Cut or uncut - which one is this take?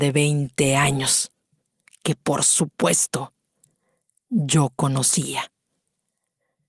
uncut